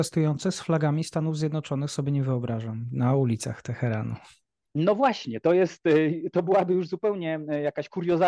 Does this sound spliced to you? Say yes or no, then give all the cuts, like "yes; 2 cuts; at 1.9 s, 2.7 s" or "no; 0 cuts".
no; 0 cuts